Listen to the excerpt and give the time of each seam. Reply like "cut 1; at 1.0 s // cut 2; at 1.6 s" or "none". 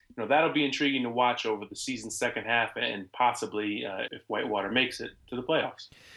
cut 1; at 4.1 s